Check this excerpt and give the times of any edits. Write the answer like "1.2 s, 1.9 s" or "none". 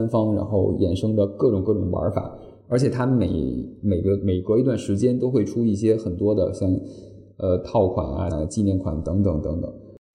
8.3 s